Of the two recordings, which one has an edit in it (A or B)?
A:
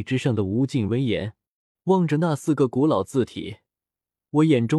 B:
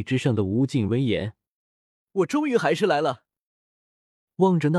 A